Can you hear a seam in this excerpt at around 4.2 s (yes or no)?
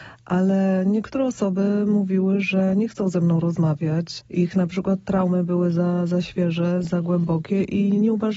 no